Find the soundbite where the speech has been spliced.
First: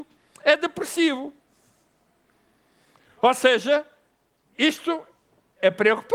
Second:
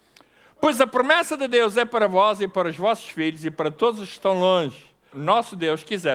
second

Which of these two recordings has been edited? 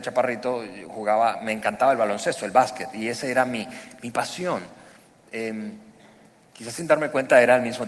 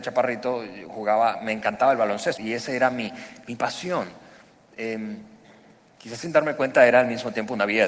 second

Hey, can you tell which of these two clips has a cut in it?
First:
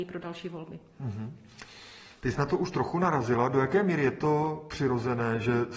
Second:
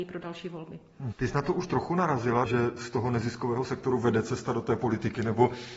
second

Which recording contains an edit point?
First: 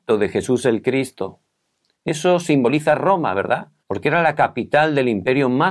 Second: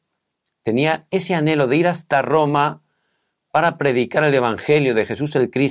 first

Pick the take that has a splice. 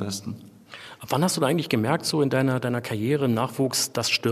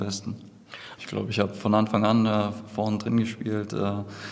second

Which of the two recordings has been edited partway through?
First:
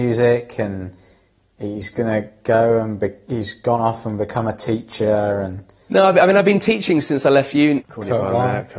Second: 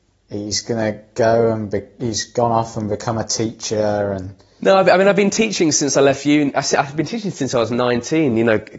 first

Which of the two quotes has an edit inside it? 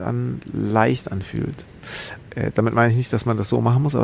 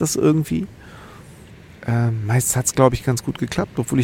first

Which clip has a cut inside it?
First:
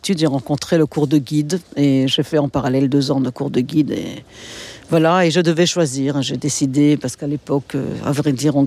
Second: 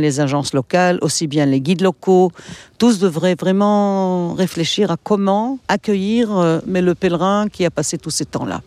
second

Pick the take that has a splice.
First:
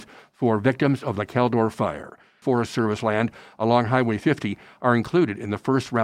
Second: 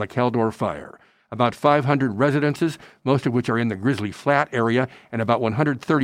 first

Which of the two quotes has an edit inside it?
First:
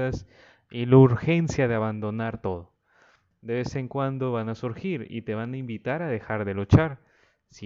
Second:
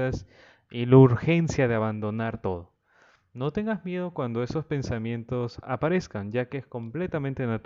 first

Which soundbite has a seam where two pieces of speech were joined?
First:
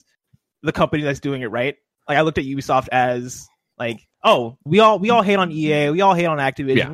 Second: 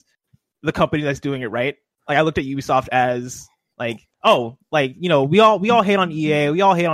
first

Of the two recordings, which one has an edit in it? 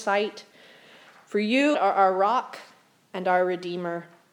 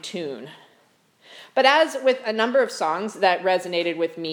first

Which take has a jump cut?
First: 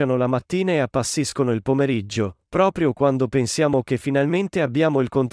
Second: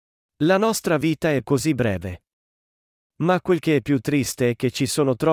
second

